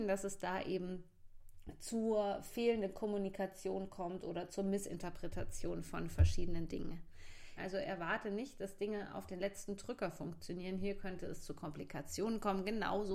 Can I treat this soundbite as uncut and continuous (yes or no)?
no